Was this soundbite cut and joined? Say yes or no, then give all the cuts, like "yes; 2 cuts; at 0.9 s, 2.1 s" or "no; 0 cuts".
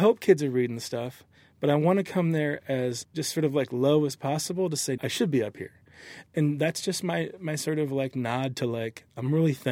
yes; 1 cut; at 5.0 s